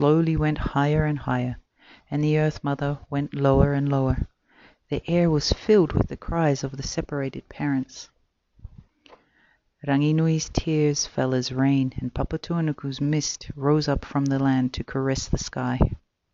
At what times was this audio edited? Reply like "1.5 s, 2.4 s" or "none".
none